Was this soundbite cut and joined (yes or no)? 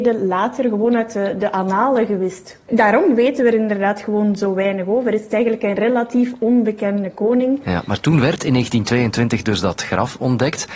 no